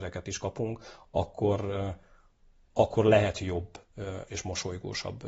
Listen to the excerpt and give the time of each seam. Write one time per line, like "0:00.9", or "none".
0:04.3